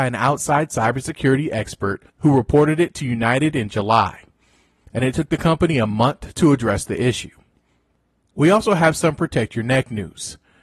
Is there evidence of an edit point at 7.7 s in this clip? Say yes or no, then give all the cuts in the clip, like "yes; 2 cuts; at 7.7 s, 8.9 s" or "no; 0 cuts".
no; 1 cut; at 2.1 s